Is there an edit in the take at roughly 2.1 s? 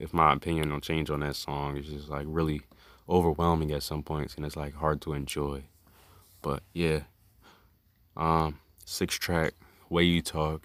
no; 0 cuts

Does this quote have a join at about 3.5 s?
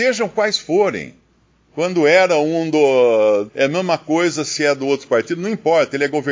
yes; 1 cut; at 3.5 s

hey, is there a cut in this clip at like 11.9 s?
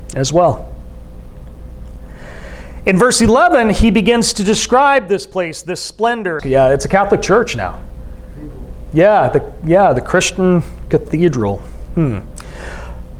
no; 1 cut; at 6.4 s

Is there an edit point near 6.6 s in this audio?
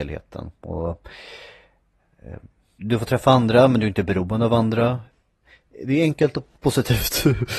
yes; 1 cut; at 6.6 s

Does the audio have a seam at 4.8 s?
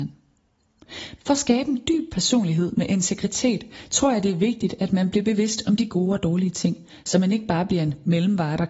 no; 1 cut; at 1.2 s

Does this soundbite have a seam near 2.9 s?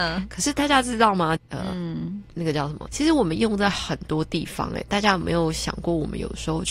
yes; 2 cuts; at 1.4 s, 2.9 s

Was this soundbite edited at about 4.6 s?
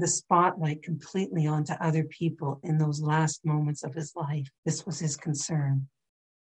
yes; 2 cuts; at 2.6 s, 4.6 s

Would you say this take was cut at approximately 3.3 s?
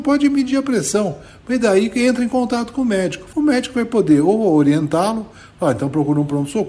yes; 1 cut; at 3.3 s

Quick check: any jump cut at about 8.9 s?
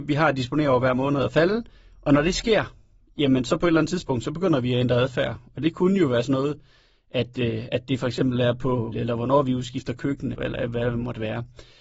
yes; 2 cuts; at 8.9 s, 10.3 s

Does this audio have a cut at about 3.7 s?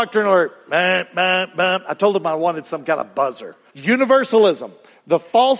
yes; 1 cut; at 3.7 s

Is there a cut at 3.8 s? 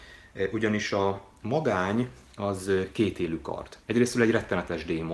yes; 1 cut; at 3.8 s

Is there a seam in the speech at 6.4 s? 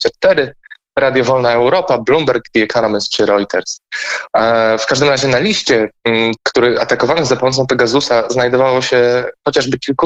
yes; 2 cuts; at 4.3 s, 6.4 s

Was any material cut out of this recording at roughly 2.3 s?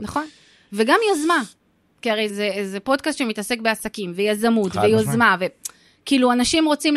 yes; 1 cut; at 2.3 s

